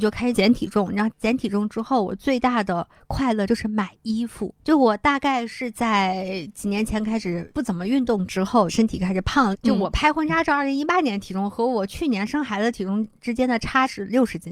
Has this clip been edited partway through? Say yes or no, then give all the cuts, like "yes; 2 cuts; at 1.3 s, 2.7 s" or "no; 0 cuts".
yes; 1 cut; at 4.6 s